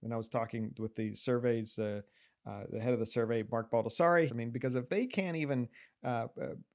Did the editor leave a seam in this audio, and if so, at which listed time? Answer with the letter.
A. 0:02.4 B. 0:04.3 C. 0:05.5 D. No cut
B